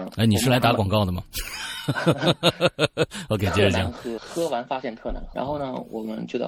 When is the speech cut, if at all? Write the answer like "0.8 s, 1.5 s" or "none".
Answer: 4.2 s, 5.3 s